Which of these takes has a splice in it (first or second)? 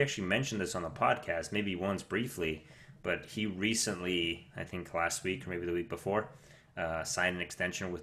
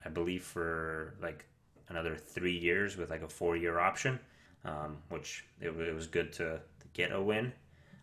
second